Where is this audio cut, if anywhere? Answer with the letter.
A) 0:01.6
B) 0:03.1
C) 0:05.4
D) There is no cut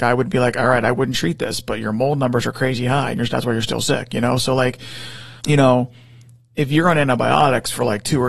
C